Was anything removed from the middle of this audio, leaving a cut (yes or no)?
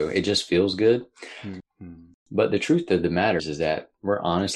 yes